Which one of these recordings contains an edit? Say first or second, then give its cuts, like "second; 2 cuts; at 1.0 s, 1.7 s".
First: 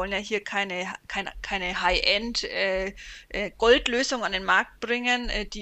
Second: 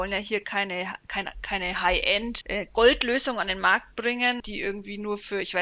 second; 2 cuts; at 2.4 s, 4.4 s